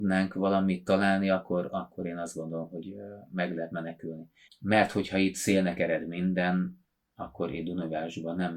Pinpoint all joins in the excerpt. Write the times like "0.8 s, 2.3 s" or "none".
4.5 s